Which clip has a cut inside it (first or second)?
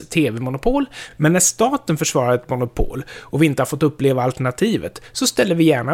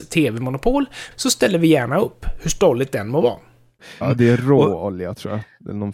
second